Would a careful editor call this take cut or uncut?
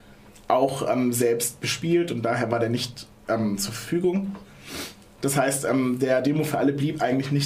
cut